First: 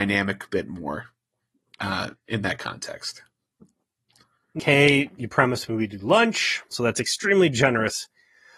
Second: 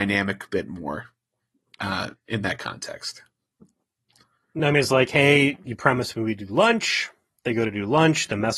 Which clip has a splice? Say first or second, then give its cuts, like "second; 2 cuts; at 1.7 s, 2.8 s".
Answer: first; 2 cuts; at 4.6 s, 6.7 s